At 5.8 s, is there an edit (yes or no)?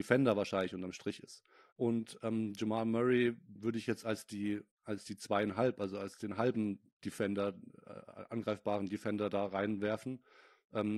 no